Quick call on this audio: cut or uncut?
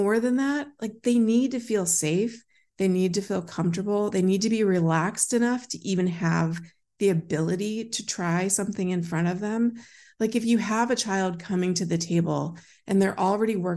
uncut